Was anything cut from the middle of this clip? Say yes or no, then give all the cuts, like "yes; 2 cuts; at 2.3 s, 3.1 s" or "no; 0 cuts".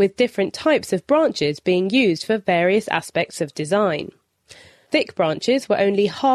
no; 0 cuts